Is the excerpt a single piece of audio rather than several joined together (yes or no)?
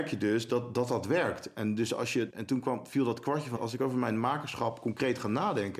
no